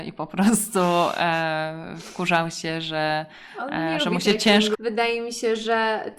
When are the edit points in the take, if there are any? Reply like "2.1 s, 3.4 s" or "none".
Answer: 4.7 s